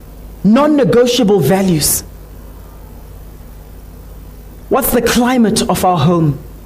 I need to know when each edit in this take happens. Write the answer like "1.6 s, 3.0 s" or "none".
4.6 s